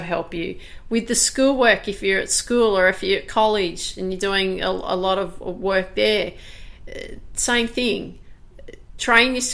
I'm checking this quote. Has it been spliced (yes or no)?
no